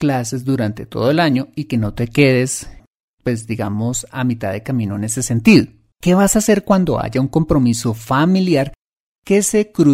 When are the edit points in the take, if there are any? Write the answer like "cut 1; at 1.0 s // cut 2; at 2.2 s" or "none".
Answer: cut 1; at 5.9 s